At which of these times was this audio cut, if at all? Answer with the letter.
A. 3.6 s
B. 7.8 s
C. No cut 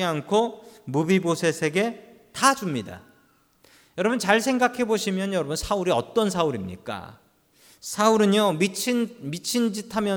C